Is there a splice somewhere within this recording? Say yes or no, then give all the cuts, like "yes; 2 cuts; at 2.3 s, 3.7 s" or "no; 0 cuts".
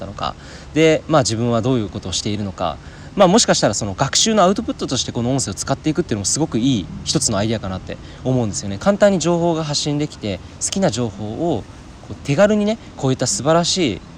yes; 2 cuts; at 8.8 s, 12.2 s